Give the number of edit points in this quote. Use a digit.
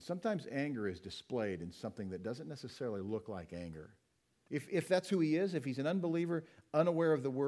1